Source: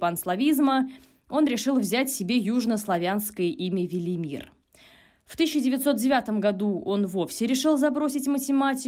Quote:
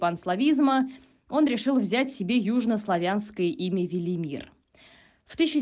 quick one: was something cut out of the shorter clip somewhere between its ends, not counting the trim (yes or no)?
no